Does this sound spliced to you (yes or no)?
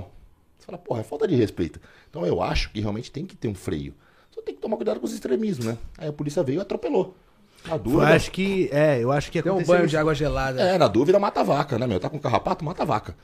no